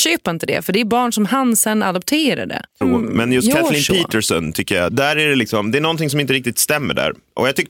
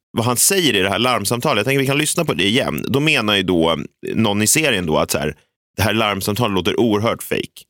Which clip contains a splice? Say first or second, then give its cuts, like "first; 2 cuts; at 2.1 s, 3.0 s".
first; 1 cut; at 2.8 s